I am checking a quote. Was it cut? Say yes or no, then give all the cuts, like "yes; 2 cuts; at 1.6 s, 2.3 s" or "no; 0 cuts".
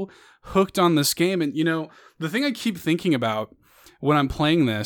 no; 0 cuts